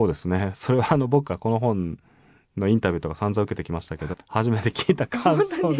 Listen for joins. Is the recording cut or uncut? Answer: cut